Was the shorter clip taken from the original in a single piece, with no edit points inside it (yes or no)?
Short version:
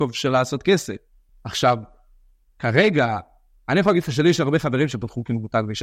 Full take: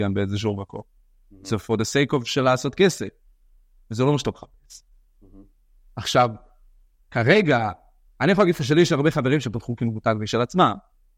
no